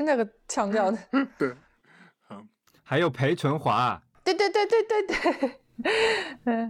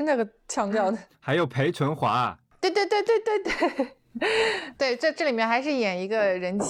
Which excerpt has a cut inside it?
second; 2 cuts; at 1.1 s, 4.7 s

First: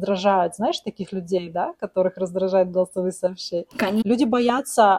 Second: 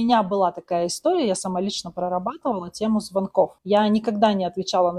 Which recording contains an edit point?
first; 1 cut; at 4.0 s

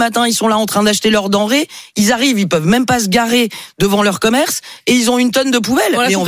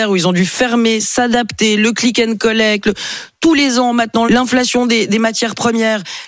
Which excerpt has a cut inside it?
second; 1 cut; at 4.3 s

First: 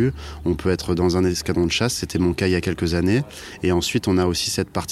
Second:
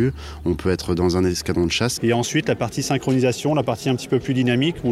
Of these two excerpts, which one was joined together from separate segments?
second; 1 cut; at 2.0 s

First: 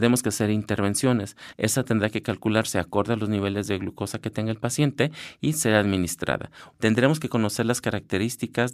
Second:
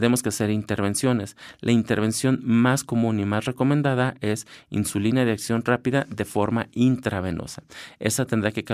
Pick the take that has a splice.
first; 2 cuts; at 1.5 s, 6.7 s

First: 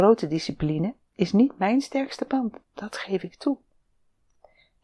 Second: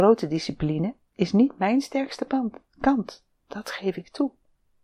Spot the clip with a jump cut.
first; 1 cut; at 2.6 s

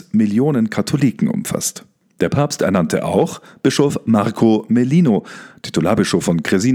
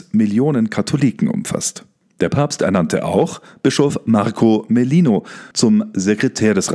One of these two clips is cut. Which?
second; 1 cut; at 5.5 s

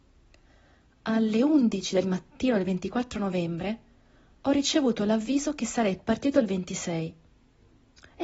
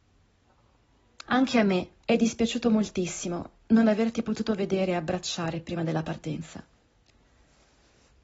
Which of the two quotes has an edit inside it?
second; 1 cut; at 1.2 s

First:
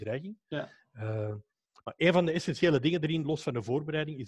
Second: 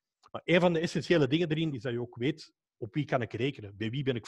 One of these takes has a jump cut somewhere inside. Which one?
second; 1 cut; at 1.7 s

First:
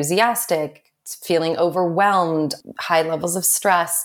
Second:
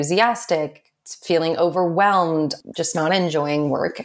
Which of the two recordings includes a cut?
second; 1 cut; at 2.7 s

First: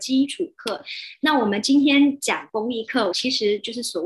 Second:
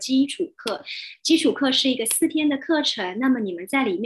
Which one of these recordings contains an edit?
first; 2 cuts; at 1.2 s, 3.1 s

